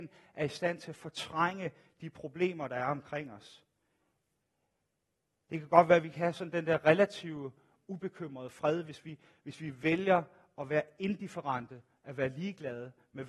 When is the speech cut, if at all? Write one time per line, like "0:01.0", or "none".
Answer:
none